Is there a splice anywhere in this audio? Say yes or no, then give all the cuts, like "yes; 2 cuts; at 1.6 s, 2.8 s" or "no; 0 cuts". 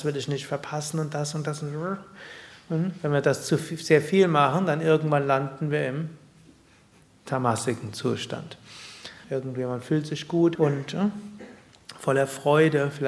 yes; 2 cuts; at 9.2 s, 10.6 s